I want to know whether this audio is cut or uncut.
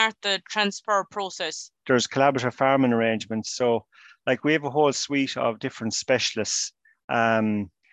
cut